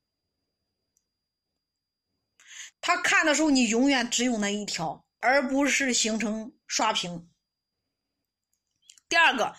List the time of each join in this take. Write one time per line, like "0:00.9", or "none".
0:02.7
0:06.6